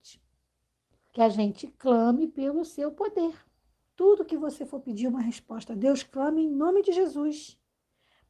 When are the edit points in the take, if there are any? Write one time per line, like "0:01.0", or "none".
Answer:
0:01.1
0:03.9